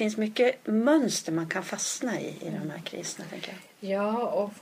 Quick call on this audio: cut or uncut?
uncut